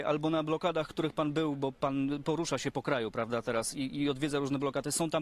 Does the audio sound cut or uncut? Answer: uncut